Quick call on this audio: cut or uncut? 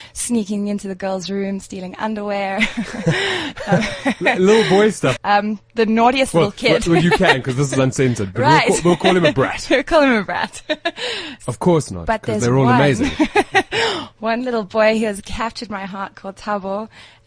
cut